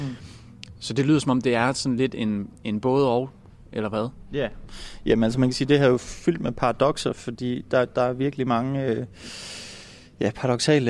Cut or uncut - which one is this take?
uncut